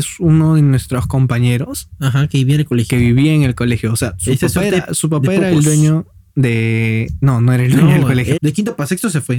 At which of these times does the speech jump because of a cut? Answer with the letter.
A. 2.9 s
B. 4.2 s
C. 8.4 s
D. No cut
C